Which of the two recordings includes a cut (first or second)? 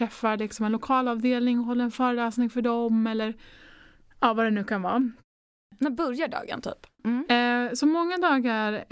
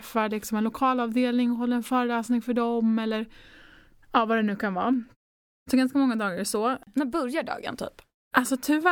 first